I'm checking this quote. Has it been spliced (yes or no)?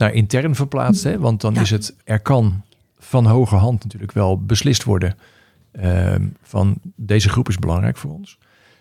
yes